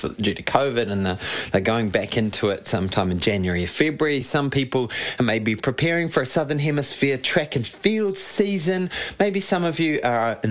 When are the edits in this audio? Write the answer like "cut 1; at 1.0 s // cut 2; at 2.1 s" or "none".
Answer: none